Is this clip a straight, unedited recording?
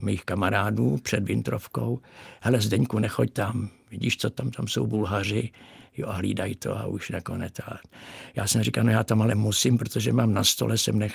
yes; 0 cuts

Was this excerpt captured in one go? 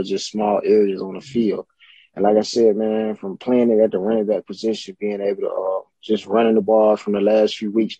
yes; 0 cuts

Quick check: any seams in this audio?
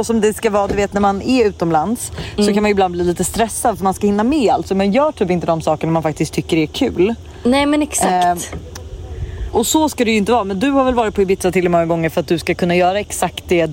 no; 0 cuts

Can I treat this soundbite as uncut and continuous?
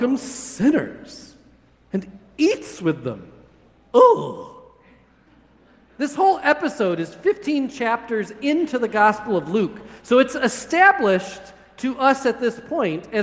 yes; 0 cuts

